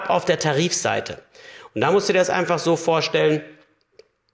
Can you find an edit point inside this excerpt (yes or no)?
no